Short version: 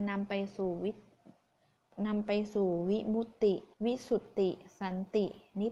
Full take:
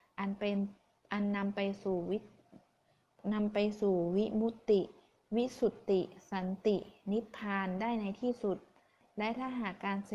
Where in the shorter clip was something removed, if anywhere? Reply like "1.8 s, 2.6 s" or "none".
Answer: 3.7 s